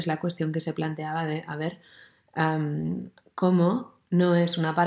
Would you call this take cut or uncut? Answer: uncut